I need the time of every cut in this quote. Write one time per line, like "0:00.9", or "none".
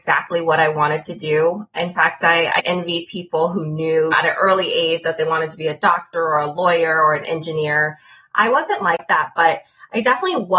none